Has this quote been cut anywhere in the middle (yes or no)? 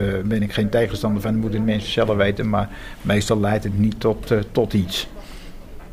no